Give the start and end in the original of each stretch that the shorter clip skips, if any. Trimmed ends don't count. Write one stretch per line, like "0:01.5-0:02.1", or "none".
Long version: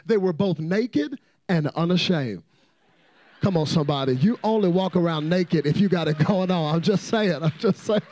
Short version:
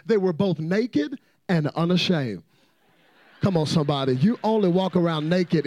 none